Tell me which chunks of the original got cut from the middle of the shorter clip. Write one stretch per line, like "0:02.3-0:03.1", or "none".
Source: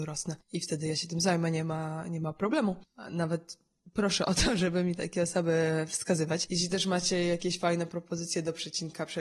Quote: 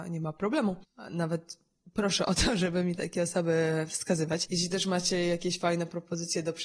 none